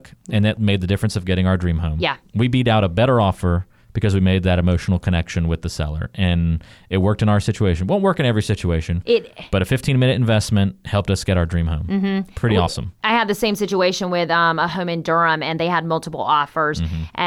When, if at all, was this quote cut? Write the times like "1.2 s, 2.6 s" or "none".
none